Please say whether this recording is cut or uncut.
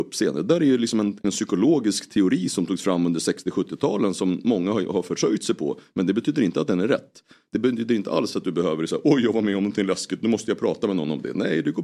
cut